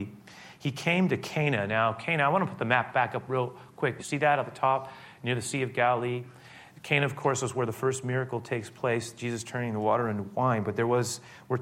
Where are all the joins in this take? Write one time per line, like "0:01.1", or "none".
0:04.0